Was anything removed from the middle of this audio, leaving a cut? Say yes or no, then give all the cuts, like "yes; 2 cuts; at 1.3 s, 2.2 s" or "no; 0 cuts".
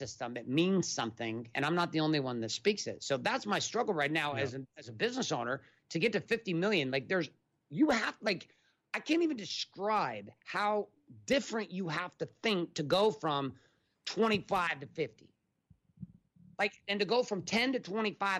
no; 0 cuts